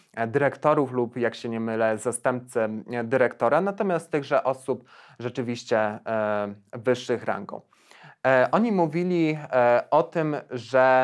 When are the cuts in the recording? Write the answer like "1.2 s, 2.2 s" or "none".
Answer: none